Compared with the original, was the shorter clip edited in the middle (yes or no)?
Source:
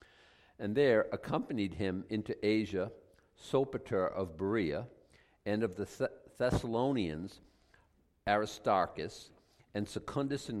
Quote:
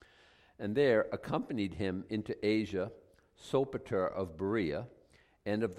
no